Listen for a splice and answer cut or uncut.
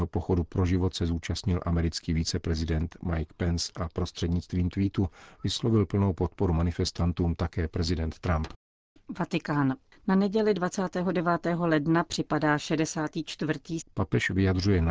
cut